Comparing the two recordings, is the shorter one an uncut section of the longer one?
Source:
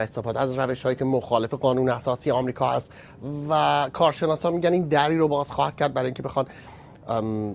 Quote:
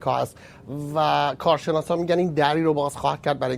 yes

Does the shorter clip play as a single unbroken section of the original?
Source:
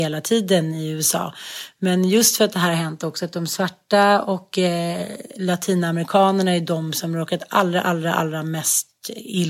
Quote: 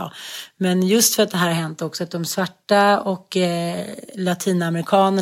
yes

